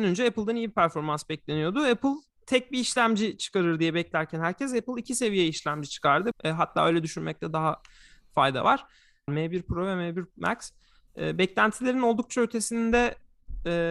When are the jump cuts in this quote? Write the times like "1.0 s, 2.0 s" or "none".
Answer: 6.3 s, 9.3 s